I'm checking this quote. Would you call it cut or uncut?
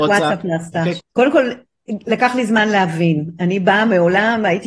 cut